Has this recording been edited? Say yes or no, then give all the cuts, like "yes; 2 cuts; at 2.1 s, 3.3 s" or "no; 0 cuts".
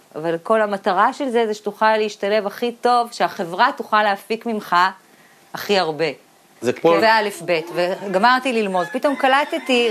yes; 1 cut; at 7.0 s